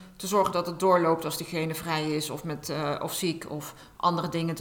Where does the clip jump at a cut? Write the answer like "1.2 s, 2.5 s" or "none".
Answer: none